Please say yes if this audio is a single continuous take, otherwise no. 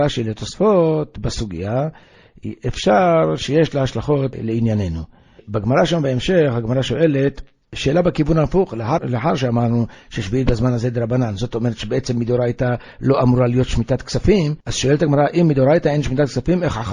no